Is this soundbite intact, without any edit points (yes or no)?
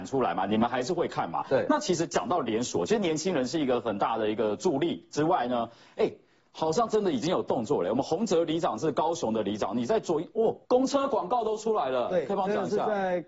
no